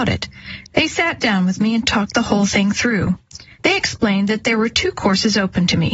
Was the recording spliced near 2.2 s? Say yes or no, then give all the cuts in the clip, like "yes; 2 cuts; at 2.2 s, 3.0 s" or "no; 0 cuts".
no; 1 cut; at 3.6 s